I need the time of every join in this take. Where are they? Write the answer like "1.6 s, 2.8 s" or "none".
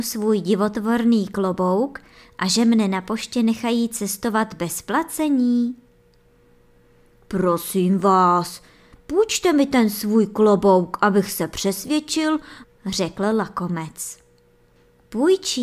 8.9 s, 12.6 s